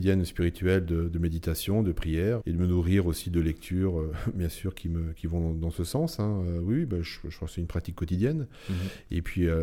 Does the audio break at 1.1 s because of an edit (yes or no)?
no